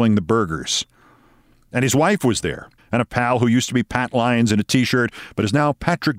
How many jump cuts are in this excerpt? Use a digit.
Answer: 1